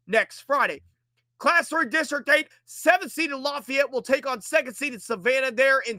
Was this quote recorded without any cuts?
no; 1 cut; at 2.5 s

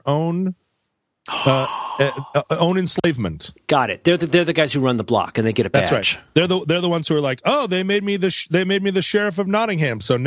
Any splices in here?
no; 0 cuts

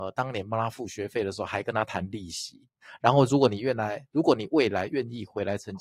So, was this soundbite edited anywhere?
no; 0 cuts

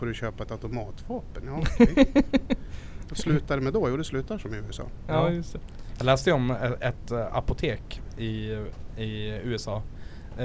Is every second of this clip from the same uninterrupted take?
yes; 0 cuts

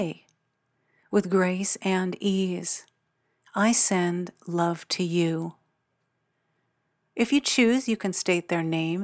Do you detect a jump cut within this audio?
no; 0 cuts

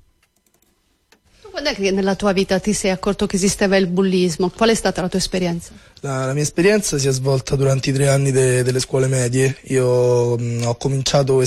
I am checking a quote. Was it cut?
no; 0 cuts

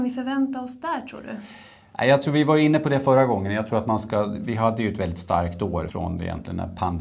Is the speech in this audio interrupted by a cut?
yes; 1 cut; at 5.9 s

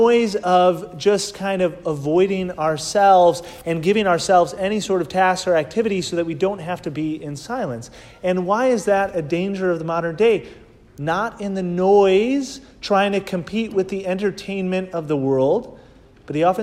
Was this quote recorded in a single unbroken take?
no; 1 cut; at 10.9 s

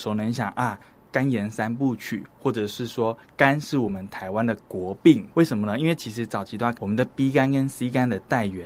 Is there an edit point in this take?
yes; 2 cuts; at 5.3 s, 6.7 s

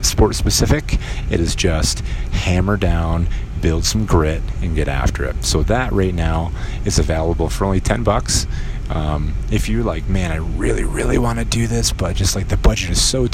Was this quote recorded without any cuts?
yes; 0 cuts

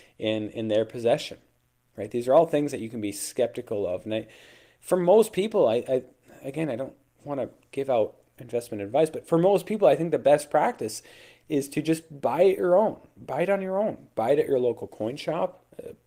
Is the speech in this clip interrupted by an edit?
no; 0 cuts

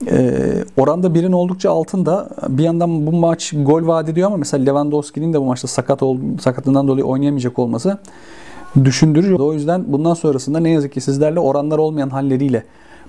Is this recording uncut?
no; 1 cut; at 9.4 s

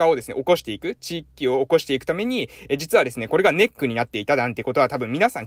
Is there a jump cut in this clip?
no; 0 cuts

